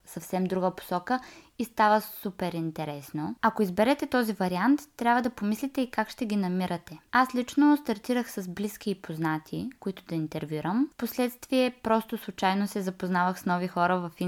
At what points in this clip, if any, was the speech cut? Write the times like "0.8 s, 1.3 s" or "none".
none